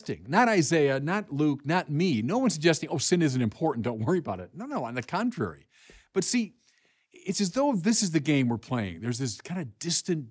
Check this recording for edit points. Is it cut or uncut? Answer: uncut